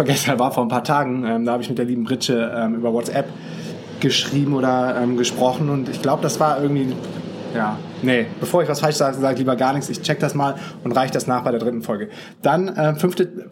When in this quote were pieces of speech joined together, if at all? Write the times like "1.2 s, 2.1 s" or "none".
none